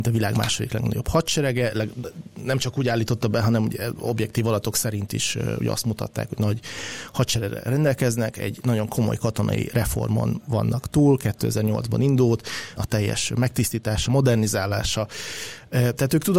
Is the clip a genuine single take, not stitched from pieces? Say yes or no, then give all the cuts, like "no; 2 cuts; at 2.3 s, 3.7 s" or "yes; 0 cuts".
no; 2 cuts; at 12.8 s, 14.1 s